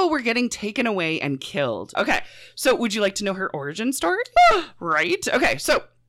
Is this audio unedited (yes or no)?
no